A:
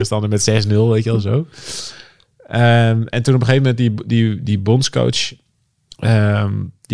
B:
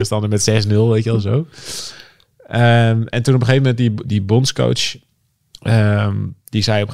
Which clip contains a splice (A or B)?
B